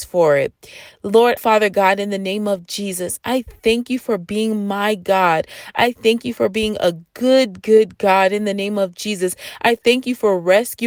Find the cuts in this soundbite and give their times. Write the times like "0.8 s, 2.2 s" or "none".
1.4 s